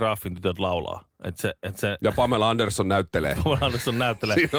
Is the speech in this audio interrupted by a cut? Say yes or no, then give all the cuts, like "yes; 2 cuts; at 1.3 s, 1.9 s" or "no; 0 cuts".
no; 0 cuts